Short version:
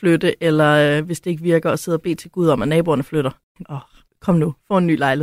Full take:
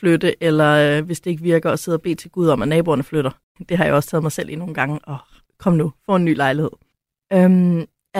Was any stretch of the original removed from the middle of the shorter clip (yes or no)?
yes